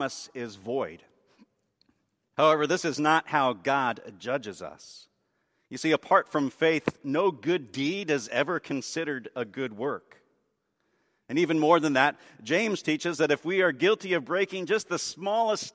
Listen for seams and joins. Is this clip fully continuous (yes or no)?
no